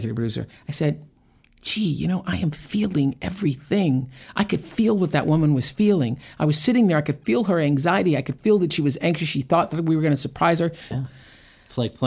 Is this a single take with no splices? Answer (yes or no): no